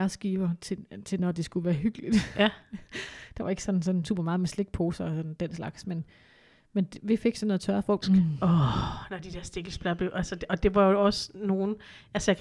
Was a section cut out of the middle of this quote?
yes; 1 cut; at 8.0 s

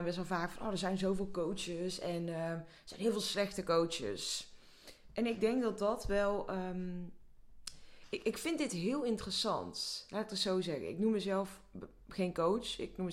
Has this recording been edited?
no; 0 cuts

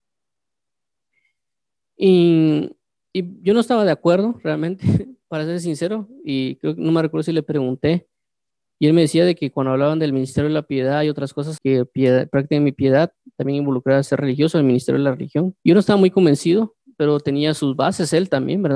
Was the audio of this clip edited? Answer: yes; 2 cuts; at 11.6 s, 15.6 s

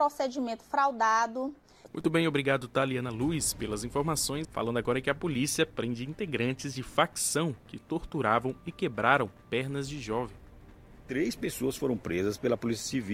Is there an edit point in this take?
yes; 2 cuts; at 1.9 s, 4.4 s

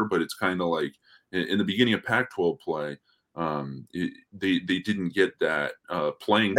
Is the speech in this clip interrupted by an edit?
no; 0 cuts

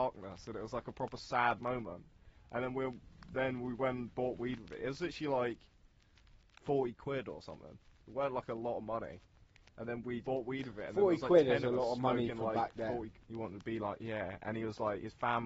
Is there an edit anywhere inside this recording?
yes; 2 cuts; at 10.2 s, 13.2 s

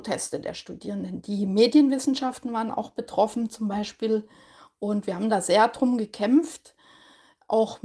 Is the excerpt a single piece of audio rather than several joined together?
yes; 0 cuts

